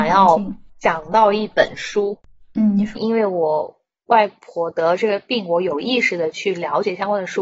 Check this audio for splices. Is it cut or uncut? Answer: cut